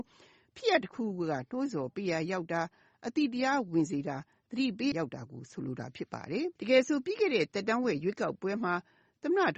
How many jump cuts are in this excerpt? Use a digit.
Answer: 2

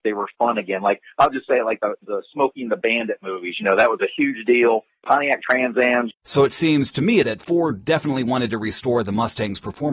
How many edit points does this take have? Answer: 2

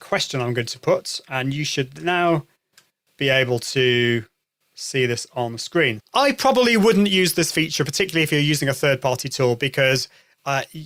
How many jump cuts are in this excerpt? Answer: 1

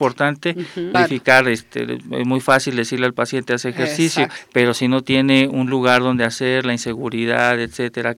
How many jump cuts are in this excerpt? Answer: 1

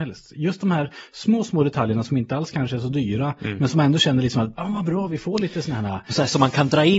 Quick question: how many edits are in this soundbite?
0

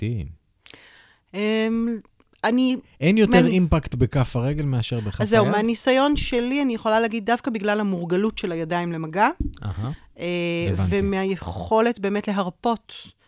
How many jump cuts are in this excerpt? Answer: 0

